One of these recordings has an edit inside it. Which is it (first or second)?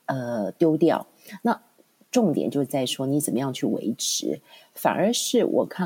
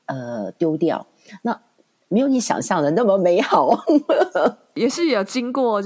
second